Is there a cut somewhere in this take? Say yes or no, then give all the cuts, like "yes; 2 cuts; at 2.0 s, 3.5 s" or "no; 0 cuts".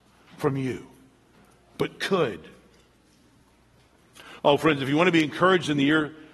yes; 1 cut; at 4.4 s